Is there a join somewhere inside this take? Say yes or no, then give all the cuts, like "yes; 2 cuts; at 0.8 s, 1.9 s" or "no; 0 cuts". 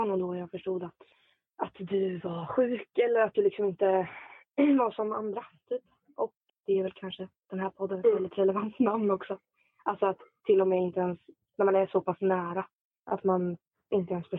yes; 1 cut; at 6.5 s